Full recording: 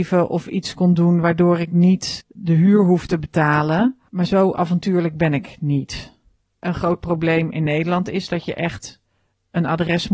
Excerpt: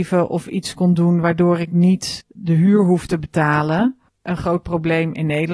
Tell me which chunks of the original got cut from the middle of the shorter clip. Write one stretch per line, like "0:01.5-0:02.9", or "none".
0:04.1-0:06.5